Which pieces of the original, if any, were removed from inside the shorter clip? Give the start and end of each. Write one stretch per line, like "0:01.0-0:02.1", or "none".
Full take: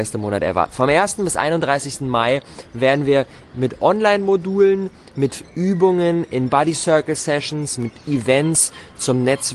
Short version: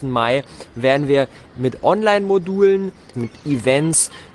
0:05.1-0:07.8